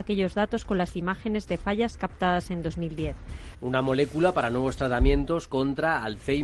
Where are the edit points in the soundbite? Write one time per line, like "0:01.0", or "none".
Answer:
0:03.5